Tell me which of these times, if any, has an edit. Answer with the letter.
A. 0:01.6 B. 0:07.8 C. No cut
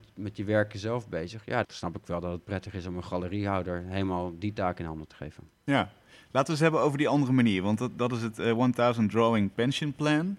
A